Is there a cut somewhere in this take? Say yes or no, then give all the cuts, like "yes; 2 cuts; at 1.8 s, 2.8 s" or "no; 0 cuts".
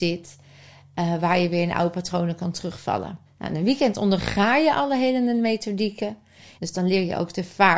yes; 2 cuts; at 3.3 s, 6.6 s